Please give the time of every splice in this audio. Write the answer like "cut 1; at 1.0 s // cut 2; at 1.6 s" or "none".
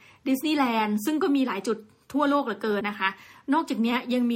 cut 1; at 2.8 s